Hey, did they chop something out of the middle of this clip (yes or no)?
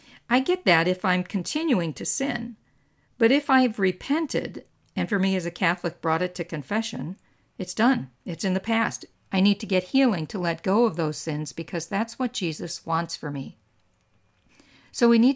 yes